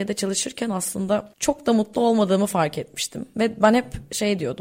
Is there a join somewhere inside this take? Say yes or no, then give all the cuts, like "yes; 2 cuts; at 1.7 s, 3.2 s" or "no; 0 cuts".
no; 0 cuts